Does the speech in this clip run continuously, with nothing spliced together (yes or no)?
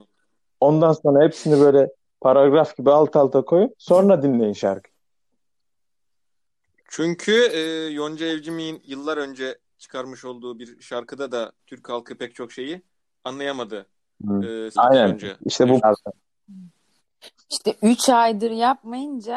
no